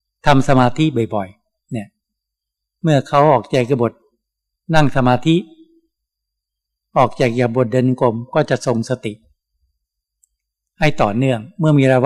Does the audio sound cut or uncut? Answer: uncut